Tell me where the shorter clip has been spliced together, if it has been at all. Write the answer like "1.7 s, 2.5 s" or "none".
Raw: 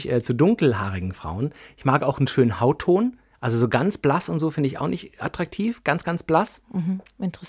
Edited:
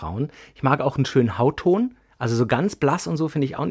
none